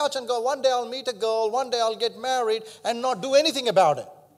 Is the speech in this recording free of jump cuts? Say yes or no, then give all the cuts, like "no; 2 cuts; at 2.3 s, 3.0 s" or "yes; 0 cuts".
yes; 0 cuts